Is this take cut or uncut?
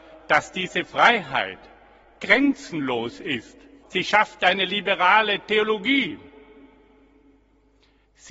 cut